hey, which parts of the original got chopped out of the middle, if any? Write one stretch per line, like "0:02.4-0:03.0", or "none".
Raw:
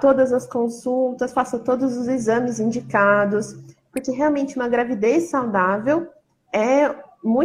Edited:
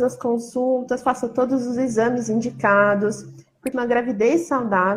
0:04.0-0:04.5